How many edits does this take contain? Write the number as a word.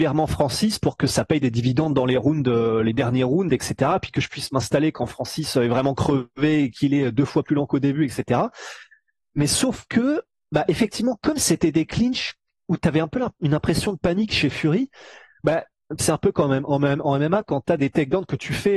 one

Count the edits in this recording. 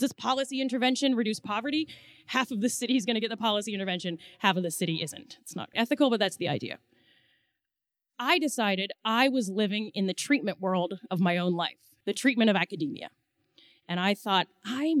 three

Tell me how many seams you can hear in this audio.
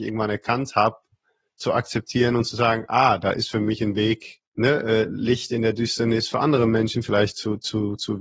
one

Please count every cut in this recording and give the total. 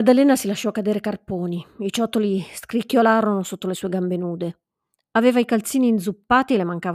zero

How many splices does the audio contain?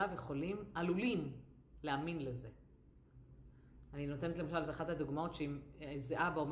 zero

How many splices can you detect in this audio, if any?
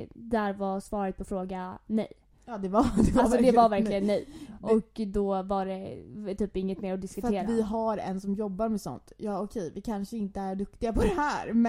zero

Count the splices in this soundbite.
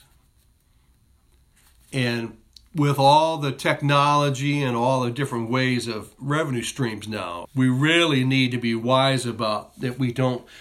one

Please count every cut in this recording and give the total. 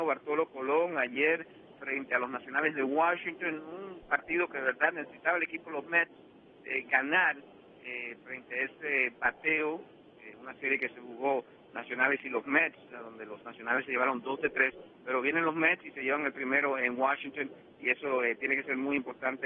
zero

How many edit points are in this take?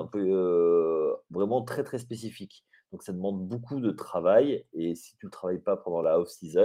one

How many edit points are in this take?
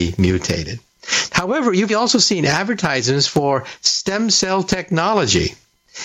one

